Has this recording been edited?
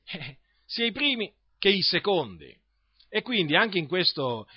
no; 0 cuts

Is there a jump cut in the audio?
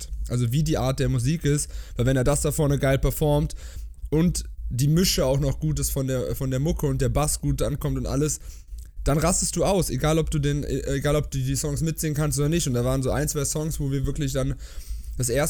no; 0 cuts

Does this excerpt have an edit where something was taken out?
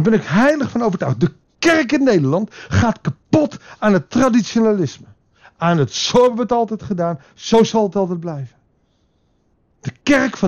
no; 0 cuts

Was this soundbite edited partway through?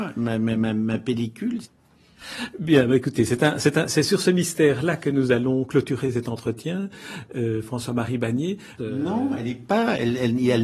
yes; 2 cuts; at 1.6 s, 8.8 s

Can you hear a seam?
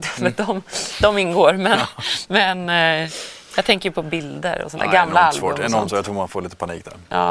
no; 0 cuts

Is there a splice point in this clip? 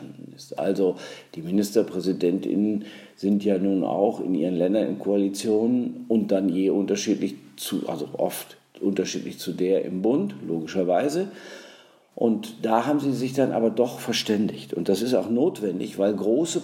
no; 0 cuts

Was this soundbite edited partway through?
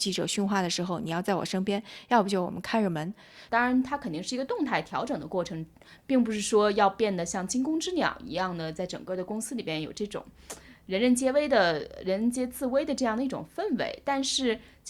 yes; 1 cut; at 3.5 s

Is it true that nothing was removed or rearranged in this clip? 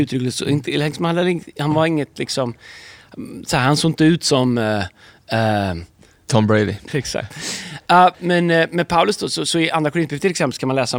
no; 2 cuts; at 6.9 s, 8.1 s

